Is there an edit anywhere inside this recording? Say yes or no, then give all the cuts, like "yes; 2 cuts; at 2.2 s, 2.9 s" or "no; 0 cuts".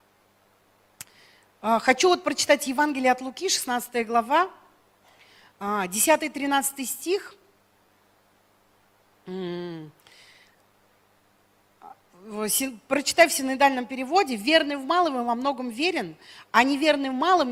no; 0 cuts